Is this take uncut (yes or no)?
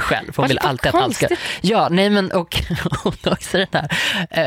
yes